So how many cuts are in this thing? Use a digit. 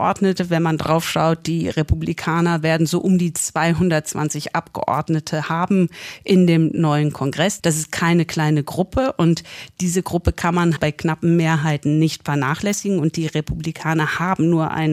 2